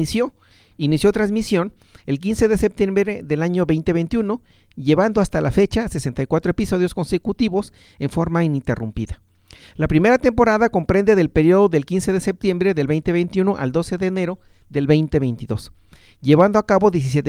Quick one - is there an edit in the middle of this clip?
no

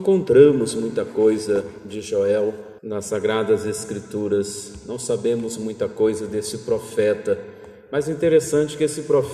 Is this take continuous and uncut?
no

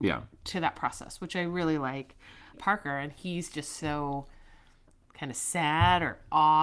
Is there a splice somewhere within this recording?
yes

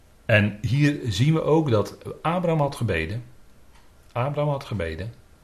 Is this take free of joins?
yes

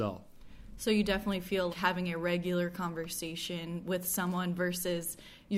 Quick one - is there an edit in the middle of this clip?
yes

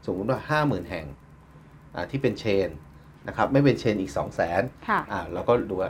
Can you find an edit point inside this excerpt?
no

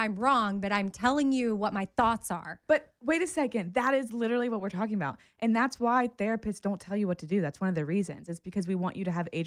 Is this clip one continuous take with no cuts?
yes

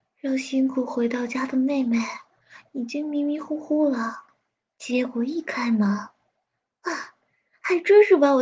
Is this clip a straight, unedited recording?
yes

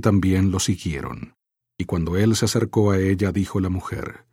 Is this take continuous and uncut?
no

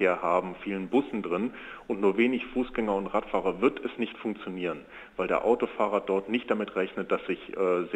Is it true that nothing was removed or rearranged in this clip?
yes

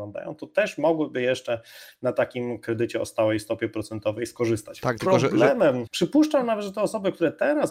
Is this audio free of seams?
no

